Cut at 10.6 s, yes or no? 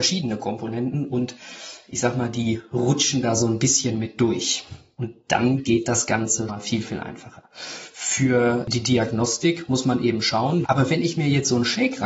yes